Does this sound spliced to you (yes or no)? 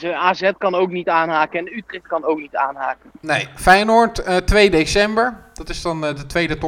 no